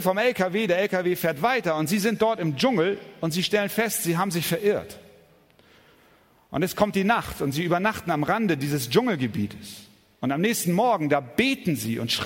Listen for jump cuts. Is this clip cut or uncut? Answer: uncut